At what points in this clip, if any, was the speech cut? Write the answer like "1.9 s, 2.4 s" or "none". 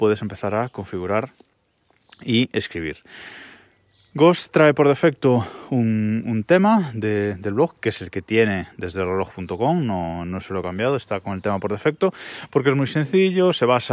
none

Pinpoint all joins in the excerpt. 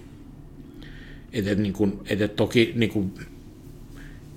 none

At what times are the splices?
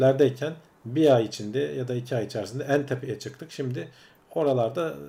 none

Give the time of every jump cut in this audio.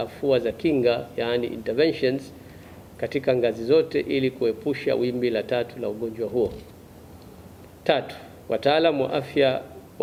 none

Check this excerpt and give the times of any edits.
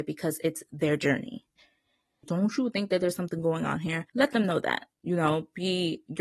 2.2 s, 4.1 s

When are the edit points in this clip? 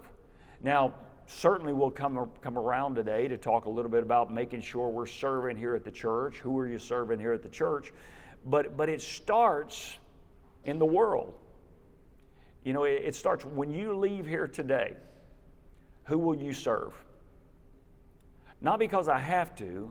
18.5 s

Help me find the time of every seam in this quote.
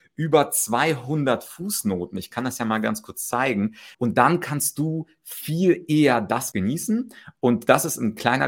3.9 s, 6.5 s

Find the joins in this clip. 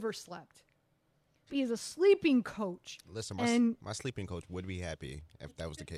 1.5 s

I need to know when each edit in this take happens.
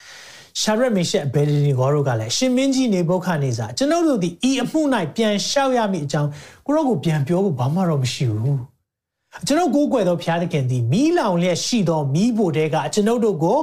none

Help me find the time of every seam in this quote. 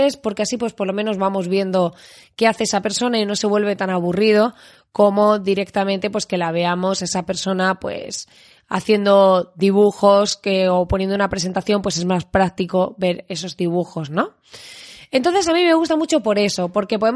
none

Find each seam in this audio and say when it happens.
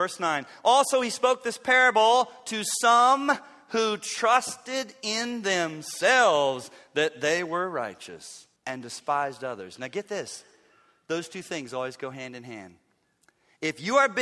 8.6 s

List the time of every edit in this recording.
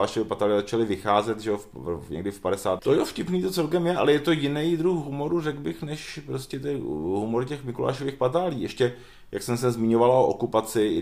2.8 s

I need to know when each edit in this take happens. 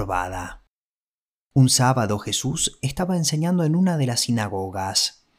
none

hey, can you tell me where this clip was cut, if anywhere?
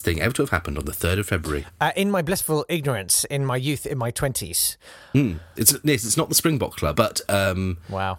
5.6 s, 6.9 s

